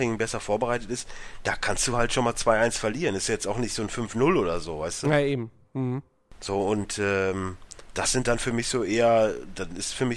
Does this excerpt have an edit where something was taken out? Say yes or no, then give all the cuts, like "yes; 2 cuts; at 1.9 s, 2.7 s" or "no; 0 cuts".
no; 0 cuts